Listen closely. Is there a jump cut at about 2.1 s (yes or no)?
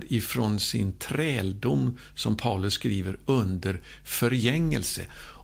no